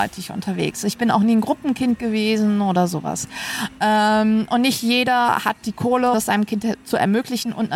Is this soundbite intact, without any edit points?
no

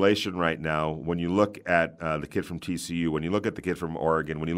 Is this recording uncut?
yes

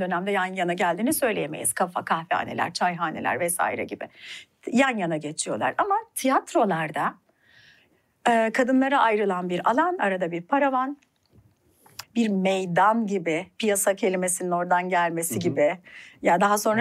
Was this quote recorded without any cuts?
no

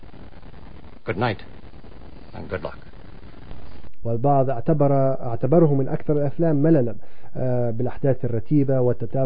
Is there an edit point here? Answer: yes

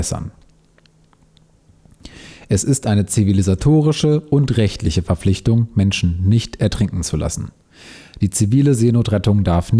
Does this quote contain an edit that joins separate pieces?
no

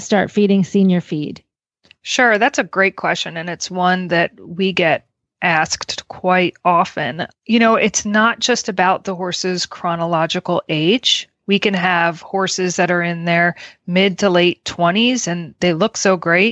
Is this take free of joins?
yes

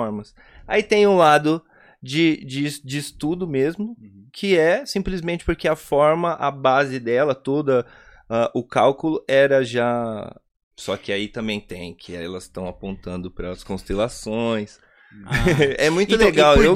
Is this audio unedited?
no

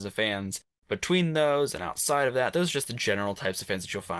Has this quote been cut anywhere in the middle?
no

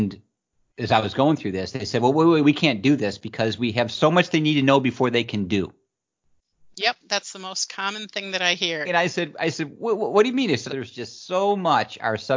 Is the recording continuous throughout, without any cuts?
no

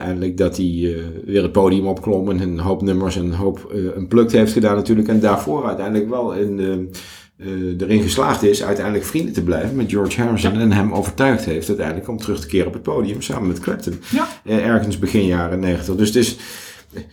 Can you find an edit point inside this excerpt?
no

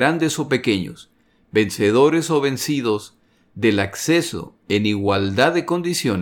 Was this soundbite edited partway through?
no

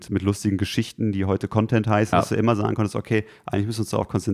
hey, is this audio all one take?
no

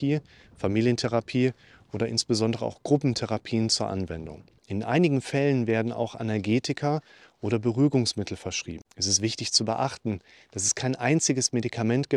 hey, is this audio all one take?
no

